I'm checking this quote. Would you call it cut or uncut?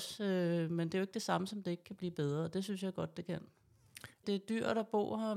cut